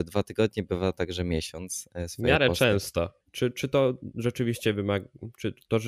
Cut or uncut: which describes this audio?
cut